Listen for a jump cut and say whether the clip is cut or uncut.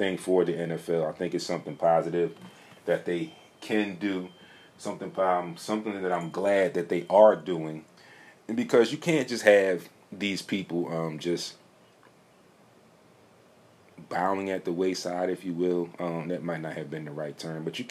uncut